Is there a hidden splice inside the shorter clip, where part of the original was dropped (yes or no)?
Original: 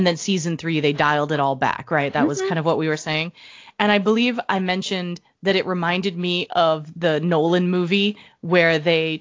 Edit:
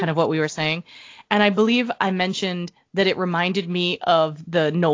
no